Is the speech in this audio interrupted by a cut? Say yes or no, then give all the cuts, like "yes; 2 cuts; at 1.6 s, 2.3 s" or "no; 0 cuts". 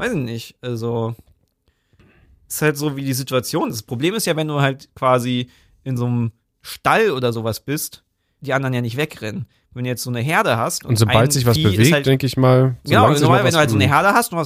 yes; 1 cut; at 8.4 s